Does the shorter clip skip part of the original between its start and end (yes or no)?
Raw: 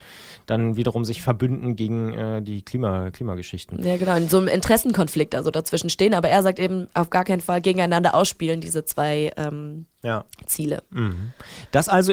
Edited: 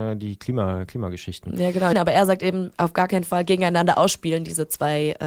yes